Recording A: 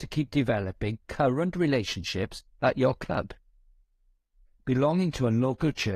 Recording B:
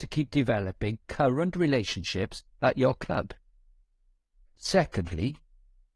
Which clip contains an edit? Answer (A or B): A